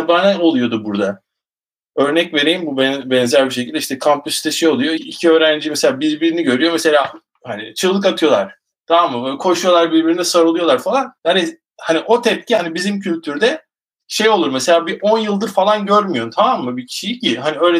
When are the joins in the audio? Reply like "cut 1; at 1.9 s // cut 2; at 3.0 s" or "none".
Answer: cut 1; at 5.0 s // cut 2; at 11.2 s